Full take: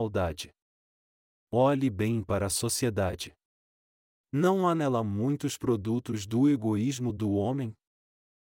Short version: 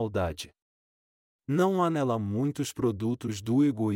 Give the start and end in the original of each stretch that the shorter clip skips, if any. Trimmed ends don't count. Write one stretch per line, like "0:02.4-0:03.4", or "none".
0:01.3-0:04.1

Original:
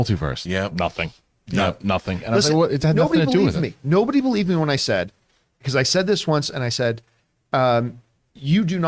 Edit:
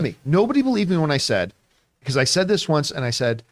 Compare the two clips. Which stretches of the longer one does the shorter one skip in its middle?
none

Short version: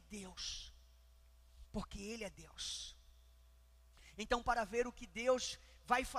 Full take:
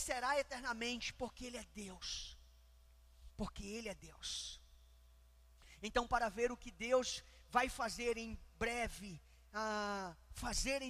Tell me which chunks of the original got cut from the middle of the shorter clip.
none

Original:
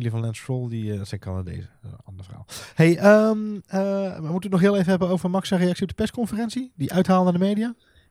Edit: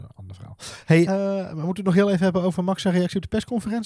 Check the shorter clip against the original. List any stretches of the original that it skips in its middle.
0:03.0-0:03.7

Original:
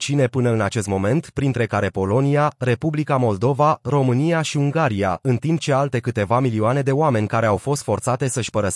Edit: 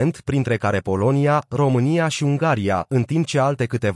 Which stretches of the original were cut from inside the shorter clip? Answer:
0:02.6-0:03.8

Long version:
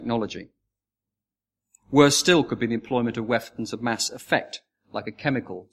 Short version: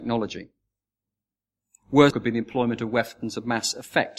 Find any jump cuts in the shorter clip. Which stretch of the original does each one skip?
0:02.1-0:02.5

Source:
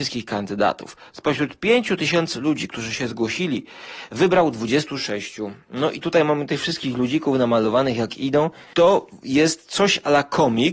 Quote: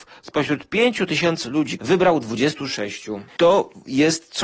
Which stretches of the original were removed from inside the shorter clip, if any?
0:02.7-0:04.1
0:05.6-0:08.6

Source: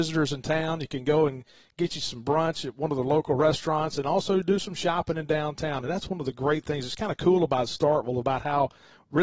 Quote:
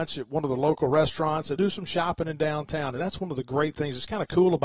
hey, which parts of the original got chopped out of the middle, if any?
0:04.0-0:04.4

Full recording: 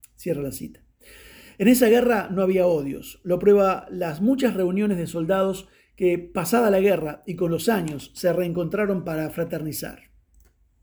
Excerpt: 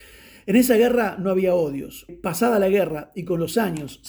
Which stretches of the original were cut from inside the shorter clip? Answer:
0:03.2-0:06.2

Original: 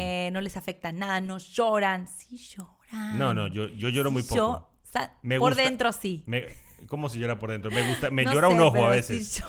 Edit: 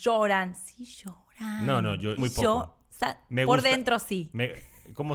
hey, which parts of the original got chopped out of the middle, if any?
0:03.7-0:04.1

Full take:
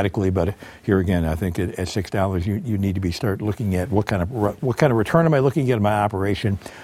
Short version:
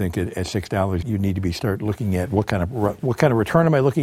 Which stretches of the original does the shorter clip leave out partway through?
0:02.4-0:02.6

